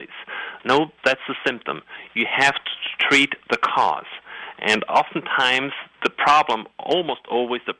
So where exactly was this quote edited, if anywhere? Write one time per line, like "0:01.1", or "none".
none

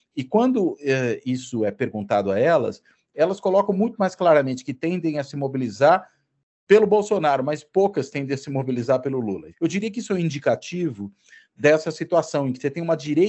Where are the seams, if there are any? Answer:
0:09.5

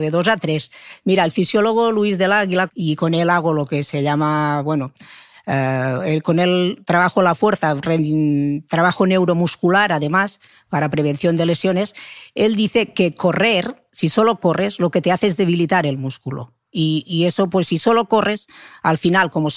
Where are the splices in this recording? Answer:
0:02.7
0:13.9

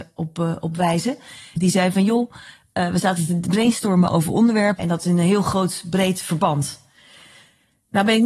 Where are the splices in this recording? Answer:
0:01.6
0:04.8

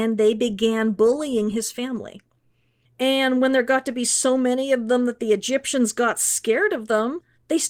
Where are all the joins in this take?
0:02.8

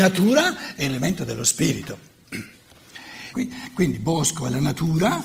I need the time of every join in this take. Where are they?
0:03.3

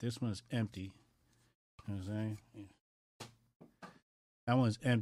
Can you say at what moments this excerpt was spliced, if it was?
none

